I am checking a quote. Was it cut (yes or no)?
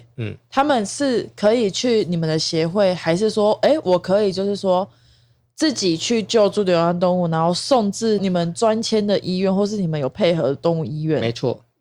no